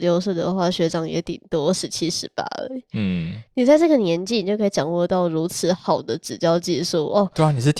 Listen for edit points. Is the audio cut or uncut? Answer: uncut